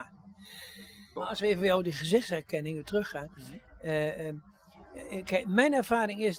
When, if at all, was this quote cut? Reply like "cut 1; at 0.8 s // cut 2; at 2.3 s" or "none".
cut 1; at 1.2 s